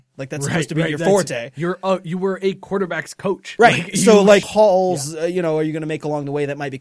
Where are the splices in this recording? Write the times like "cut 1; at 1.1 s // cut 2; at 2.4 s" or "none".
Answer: cut 1; at 4.4 s